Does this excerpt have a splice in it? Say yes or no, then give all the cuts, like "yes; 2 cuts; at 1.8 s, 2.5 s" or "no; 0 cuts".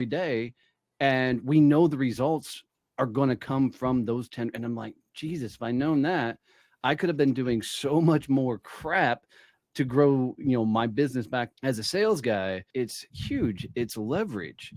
yes; 2 cuts; at 11.5 s, 12.7 s